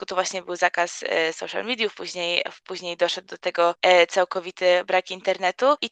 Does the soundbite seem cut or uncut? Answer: uncut